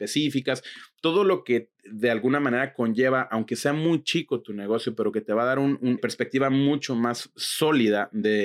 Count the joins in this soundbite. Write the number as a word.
one